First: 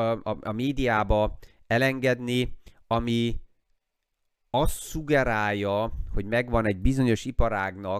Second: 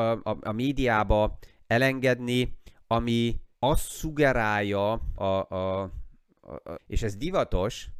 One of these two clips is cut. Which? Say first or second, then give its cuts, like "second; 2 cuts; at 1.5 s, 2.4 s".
second; 3 cuts; at 3.5 s, 5.2 s, 6.8 s